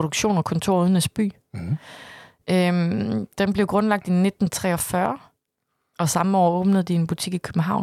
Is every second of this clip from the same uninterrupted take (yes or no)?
yes